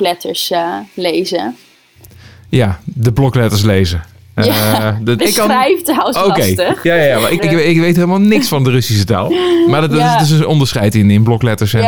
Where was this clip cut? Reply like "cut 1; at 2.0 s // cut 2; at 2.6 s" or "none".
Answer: cut 1; at 5.2 s // cut 2; at 7.4 s